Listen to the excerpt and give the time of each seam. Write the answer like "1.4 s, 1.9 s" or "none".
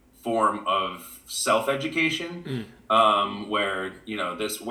none

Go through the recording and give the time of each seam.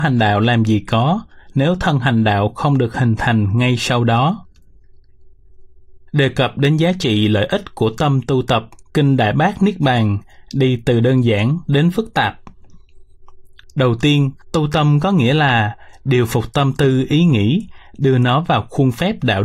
8.8 s, 14.4 s

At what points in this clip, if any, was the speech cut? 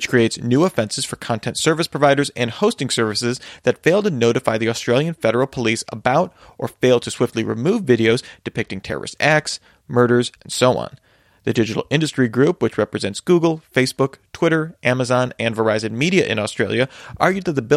10.4 s

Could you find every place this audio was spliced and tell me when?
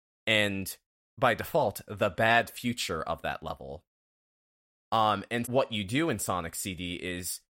5.4 s

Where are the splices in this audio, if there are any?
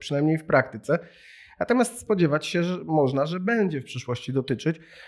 none

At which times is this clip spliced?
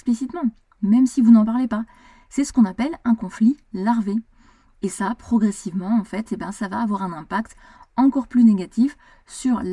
none

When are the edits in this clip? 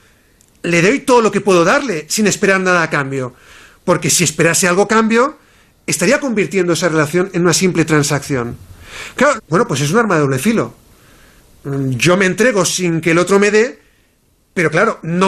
9.4 s

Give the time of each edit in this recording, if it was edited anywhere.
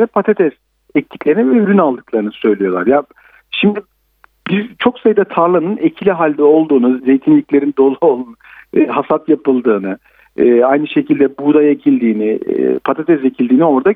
7.0 s

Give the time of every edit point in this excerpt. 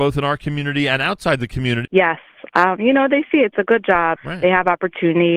1.8 s, 4.2 s

